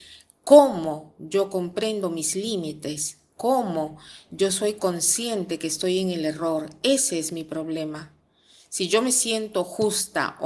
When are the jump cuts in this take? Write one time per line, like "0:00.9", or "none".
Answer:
none